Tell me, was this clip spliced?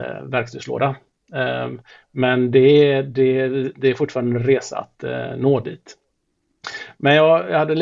no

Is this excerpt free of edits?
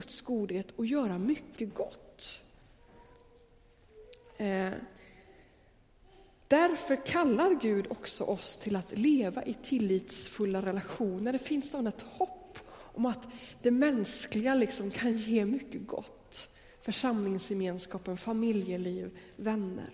yes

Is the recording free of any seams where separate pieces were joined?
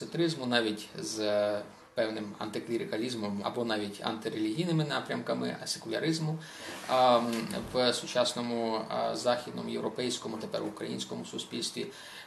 no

